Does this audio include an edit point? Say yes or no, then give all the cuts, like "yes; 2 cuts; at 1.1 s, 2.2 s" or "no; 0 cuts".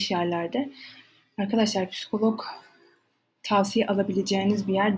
no; 0 cuts